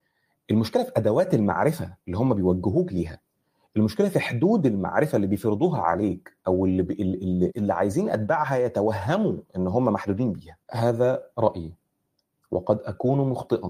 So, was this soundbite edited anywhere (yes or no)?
yes